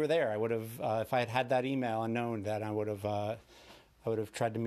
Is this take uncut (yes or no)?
yes